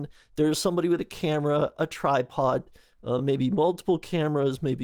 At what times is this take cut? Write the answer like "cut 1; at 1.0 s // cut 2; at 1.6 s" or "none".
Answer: none